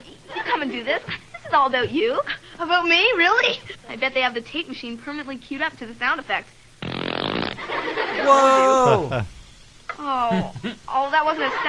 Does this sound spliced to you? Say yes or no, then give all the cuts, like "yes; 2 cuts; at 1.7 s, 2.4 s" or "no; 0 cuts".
yes; 1 cut; at 3.7 s